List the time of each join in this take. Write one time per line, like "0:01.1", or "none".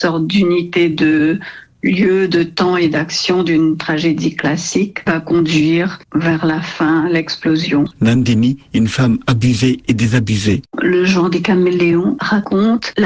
0:07.9
0:10.6